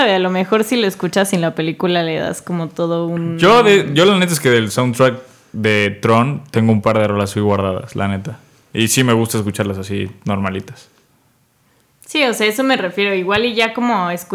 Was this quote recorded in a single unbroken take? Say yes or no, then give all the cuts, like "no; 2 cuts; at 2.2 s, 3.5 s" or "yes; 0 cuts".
yes; 0 cuts